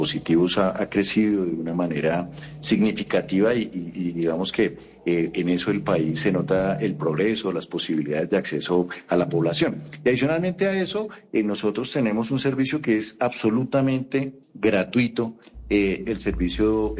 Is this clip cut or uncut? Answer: cut